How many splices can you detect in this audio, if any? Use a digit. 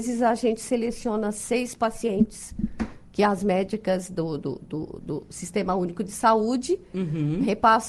0